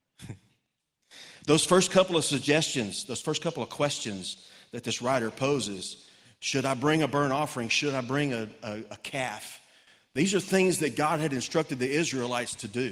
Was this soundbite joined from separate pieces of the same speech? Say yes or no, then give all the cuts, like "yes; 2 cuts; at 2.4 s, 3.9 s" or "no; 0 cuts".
no; 0 cuts